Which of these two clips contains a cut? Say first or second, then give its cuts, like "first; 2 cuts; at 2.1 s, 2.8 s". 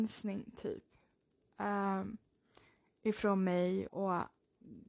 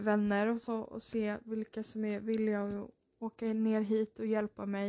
first; 1 cut; at 3.9 s